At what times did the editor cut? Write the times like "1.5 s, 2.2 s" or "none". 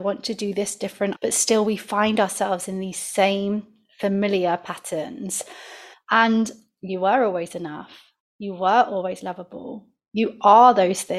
1.1 s, 5.9 s